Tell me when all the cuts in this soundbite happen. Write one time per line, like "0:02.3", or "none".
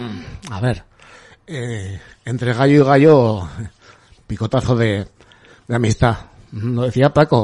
0:04.2